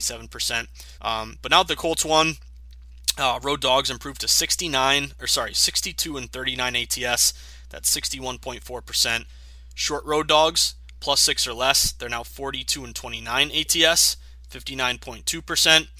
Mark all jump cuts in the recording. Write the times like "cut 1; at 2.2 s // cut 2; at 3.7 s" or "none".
cut 1; at 1.0 s